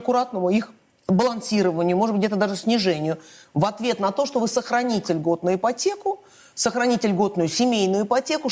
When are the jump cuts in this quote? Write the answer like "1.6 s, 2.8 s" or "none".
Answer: none